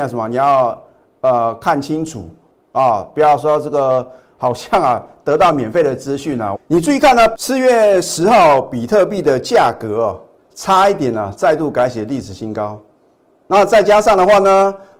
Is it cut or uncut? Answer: cut